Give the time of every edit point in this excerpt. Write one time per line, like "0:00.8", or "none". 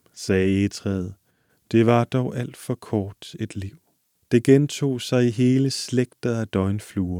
0:04.1